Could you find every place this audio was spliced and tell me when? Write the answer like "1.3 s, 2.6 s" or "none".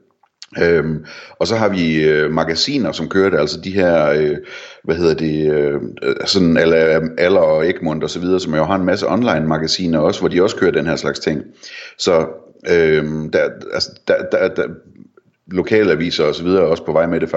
none